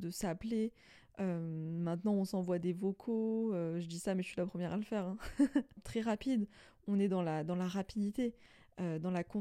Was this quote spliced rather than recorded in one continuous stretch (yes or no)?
yes